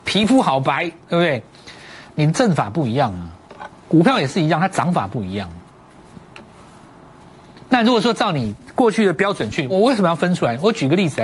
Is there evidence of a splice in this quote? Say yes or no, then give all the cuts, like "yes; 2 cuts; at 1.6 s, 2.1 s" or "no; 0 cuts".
yes; 1 cut; at 9.7 s